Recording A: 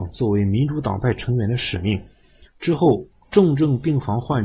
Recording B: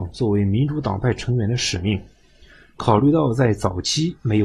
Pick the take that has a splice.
A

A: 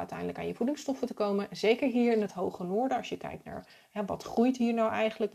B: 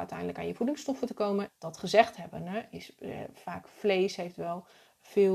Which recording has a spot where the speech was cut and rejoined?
B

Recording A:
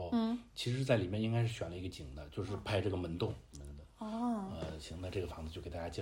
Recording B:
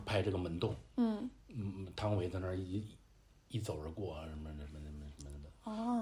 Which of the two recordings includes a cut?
A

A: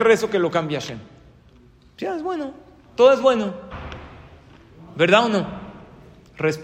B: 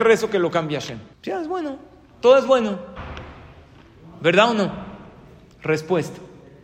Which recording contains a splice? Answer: B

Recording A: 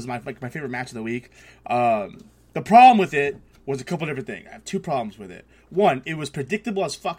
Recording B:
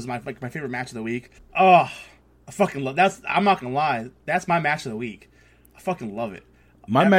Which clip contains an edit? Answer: B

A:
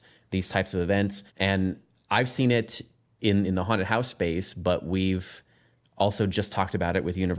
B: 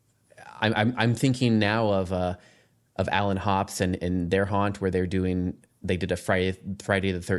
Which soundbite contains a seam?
A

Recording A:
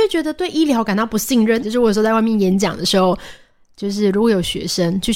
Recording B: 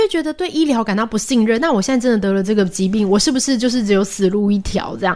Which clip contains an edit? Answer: A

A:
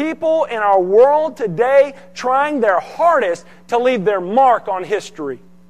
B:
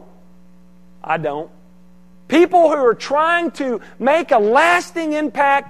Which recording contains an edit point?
B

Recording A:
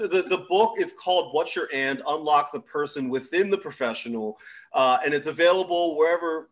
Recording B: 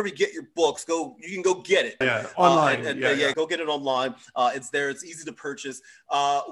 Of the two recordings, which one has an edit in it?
B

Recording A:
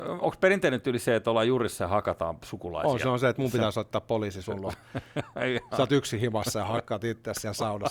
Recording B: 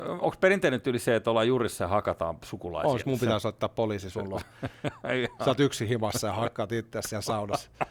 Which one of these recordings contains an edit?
B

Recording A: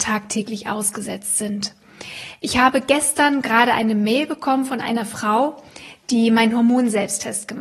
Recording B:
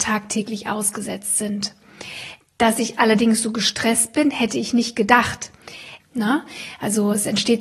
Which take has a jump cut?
B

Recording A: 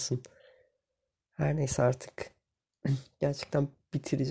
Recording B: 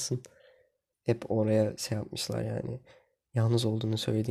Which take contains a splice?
B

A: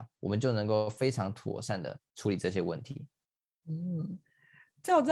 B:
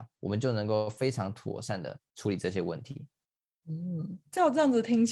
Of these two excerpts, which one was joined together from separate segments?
B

